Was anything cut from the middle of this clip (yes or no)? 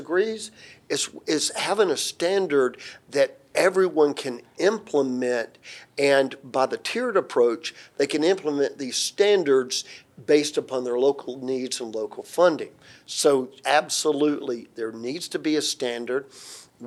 yes